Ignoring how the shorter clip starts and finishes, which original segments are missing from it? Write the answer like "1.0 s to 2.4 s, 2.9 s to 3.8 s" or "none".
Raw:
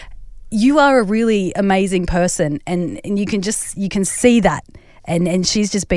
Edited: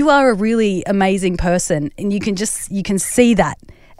2.6 s to 3.0 s